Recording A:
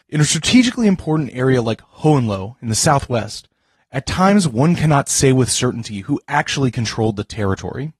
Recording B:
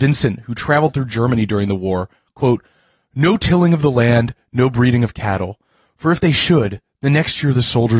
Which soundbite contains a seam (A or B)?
A